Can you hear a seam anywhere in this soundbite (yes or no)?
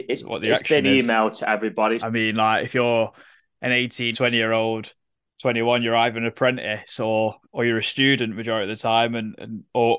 yes